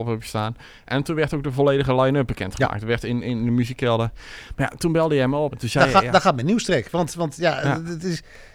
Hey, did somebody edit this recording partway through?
yes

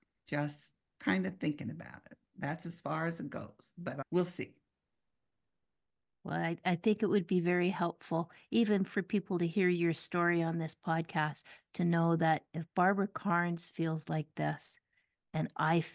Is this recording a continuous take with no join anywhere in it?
yes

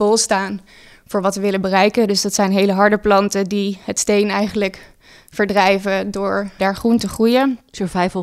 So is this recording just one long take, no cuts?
no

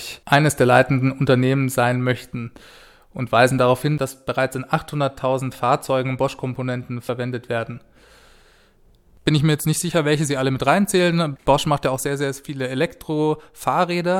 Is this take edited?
no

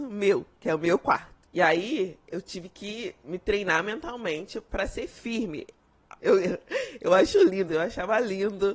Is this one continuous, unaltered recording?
no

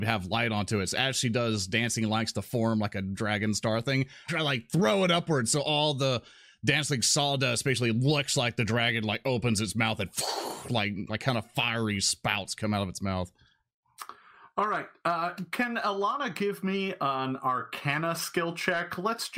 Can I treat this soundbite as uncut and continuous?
no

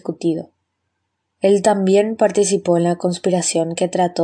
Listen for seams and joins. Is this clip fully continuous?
no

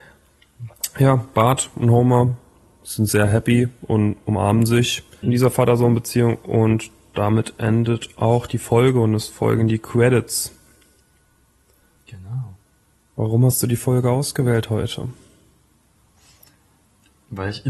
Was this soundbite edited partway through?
yes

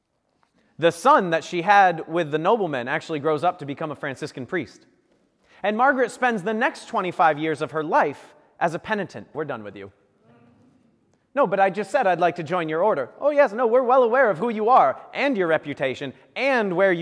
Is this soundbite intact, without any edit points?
no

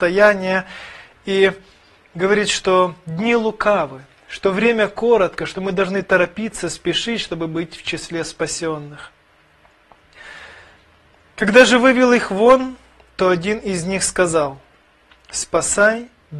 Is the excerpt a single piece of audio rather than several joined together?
yes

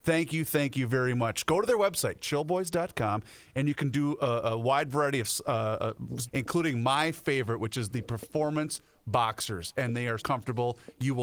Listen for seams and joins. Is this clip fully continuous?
no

